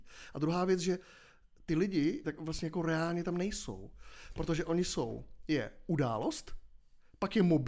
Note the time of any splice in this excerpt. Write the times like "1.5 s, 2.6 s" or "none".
2.2 s